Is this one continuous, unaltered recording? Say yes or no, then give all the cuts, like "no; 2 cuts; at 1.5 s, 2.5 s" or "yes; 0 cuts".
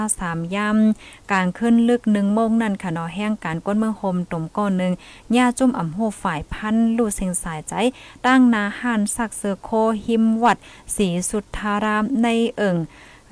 yes; 0 cuts